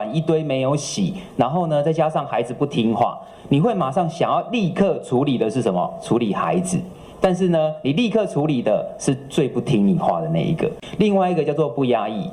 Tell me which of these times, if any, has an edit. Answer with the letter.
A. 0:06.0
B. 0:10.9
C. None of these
C